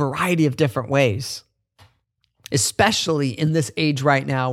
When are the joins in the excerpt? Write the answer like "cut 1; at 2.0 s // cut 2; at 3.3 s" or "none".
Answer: cut 1; at 2.5 s